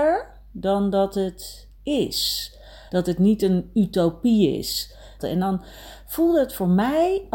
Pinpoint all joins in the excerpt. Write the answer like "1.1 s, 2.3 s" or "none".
1.8 s, 2.9 s, 5.2 s